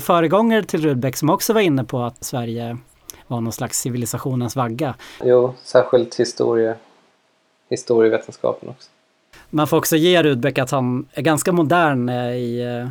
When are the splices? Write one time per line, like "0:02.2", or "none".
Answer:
0:02.2
0:05.2
0:11.1